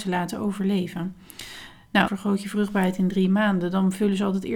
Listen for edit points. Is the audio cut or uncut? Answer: cut